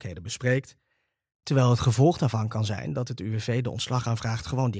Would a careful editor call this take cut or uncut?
cut